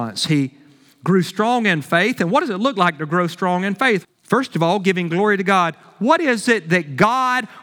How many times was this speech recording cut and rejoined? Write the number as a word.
one